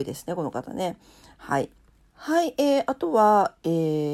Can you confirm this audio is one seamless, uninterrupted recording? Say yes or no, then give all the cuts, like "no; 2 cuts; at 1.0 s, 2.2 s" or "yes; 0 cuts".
no; 1 cut; at 2.0 s